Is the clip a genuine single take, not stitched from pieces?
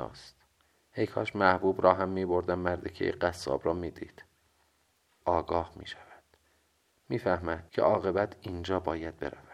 no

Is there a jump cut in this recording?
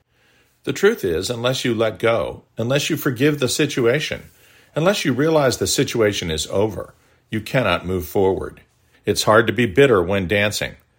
yes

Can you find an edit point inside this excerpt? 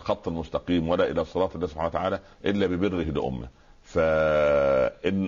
no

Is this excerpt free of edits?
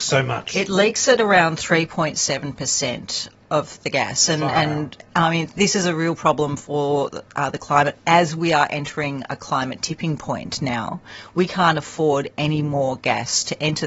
yes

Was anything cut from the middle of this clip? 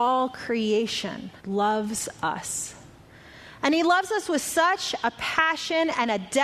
yes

